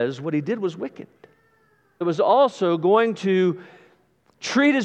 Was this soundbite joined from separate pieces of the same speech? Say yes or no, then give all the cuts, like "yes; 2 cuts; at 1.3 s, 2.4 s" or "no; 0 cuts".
yes; 1 cut; at 2.0 s